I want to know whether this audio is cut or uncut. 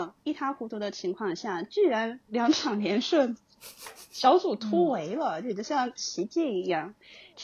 uncut